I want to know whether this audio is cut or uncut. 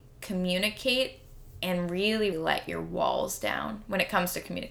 cut